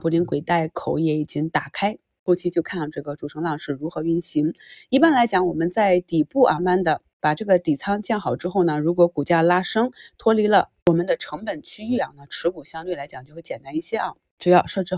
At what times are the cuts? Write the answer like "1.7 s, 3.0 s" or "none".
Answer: 6.6 s